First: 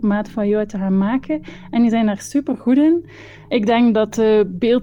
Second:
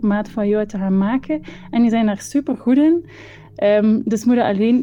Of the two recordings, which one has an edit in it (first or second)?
first